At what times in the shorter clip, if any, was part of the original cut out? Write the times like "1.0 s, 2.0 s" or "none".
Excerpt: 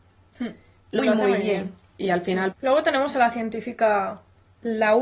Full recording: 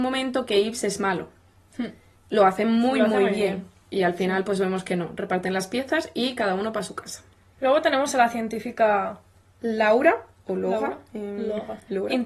1.0 s, 2.5 s

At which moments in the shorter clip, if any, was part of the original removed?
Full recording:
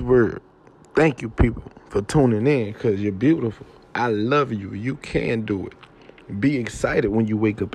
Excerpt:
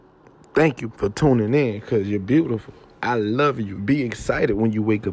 0.9 s, 3.8 s

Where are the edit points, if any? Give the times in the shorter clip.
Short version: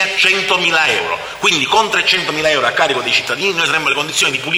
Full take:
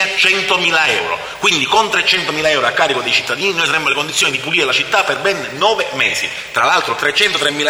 none

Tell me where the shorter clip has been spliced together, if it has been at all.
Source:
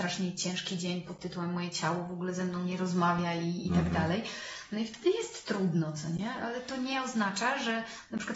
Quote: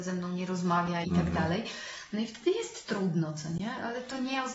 1.0 s

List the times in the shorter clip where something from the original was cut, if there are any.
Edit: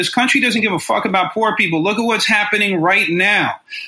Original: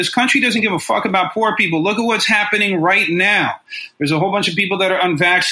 none

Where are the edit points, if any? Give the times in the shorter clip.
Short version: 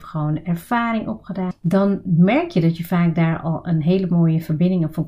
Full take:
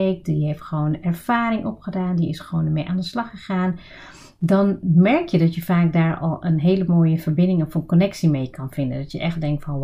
1.5 s

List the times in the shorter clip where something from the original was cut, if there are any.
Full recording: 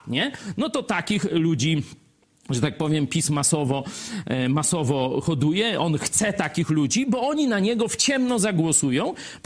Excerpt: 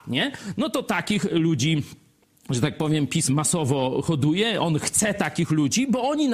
3.3 s

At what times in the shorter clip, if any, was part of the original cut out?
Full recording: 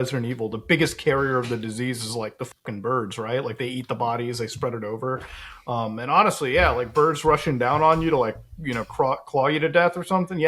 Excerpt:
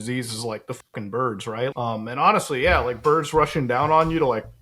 1.7 s

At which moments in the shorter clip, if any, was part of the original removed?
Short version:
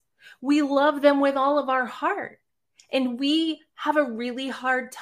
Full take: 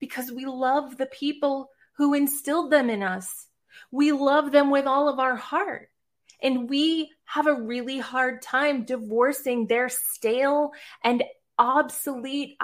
none

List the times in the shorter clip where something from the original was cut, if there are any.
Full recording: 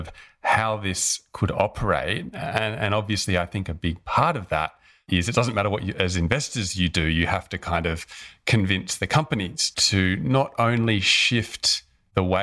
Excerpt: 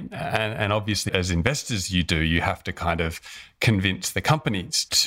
1.1 s

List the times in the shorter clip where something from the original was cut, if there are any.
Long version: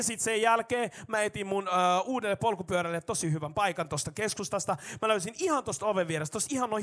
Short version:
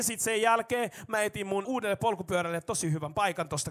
1.6 s

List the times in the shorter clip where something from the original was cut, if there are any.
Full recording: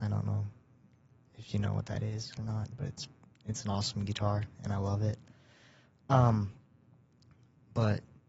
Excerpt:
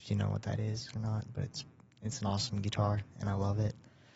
none

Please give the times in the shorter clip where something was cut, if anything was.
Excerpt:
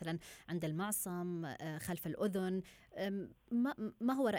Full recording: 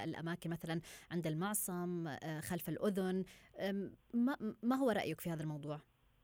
none

